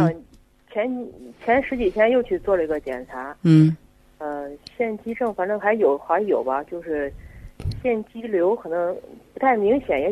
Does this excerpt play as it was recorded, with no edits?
yes; 0 cuts

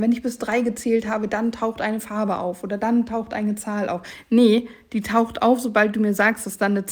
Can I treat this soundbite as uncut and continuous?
yes; 0 cuts

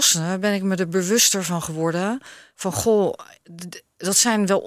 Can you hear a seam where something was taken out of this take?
no; 0 cuts

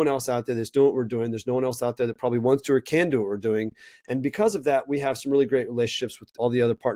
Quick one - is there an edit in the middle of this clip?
no; 0 cuts

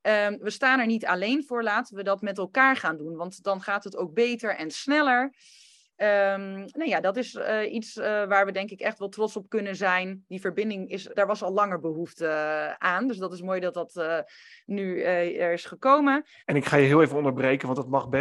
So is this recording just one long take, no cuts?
no; 2 cuts; at 11.1 s, 16.4 s

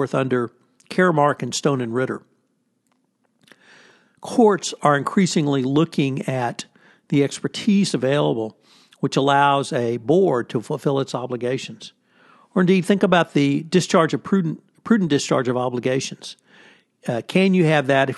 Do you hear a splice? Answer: no; 0 cuts

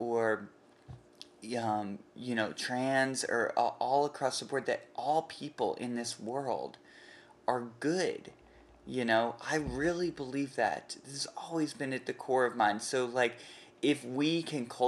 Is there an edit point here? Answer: no; 0 cuts

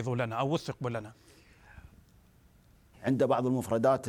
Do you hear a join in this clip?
yes; 1 cut; at 2.9 s

